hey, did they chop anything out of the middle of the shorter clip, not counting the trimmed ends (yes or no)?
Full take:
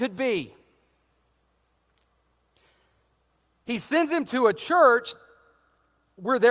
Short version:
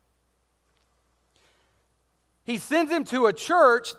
no